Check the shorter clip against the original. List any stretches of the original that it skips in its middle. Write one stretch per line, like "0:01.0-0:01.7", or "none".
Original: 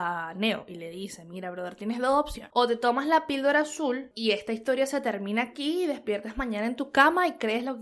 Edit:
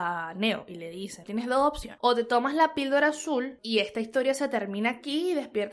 0:01.2-0:01.8